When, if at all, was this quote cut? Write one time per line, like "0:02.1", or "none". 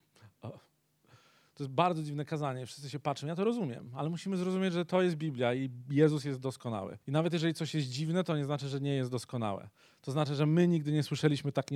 0:07.0